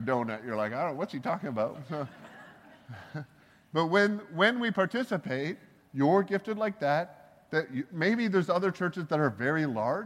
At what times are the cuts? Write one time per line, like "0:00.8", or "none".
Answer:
0:05.8